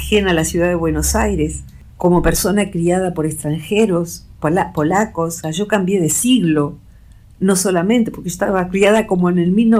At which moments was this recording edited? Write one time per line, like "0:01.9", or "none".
0:05.4

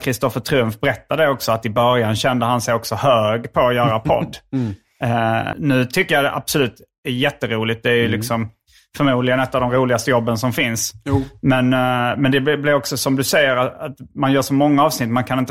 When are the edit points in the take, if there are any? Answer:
0:05.5

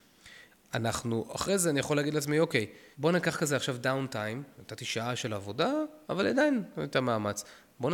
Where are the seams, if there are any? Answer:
0:02.9
0:04.5
0:06.0

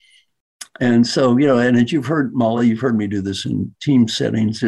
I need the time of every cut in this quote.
none

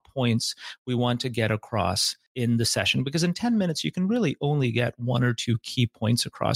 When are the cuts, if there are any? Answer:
none

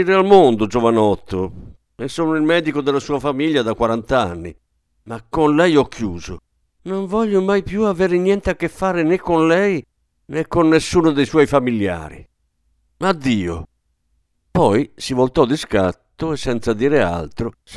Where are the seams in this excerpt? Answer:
none

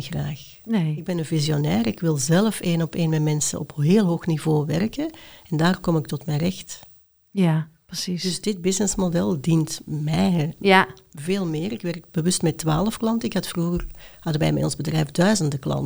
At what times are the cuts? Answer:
none

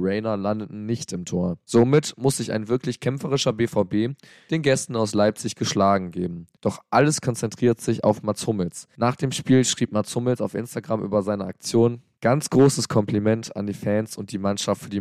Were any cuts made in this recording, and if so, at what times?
none

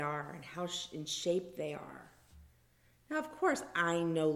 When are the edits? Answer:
none

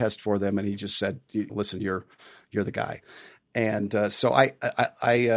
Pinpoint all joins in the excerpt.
0:01.5

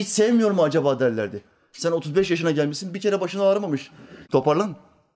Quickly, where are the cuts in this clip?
0:04.2

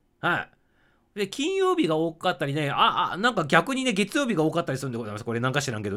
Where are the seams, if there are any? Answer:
none

